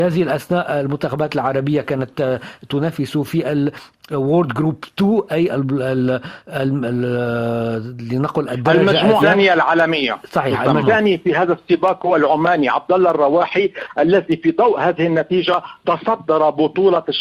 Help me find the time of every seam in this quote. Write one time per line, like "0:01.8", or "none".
0:09.2
0:10.8